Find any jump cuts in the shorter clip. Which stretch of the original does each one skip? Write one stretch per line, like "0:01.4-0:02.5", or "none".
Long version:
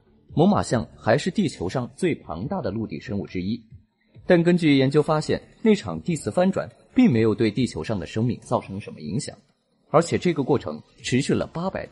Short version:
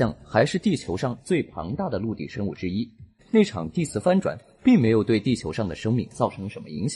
0:03.9-0:05.5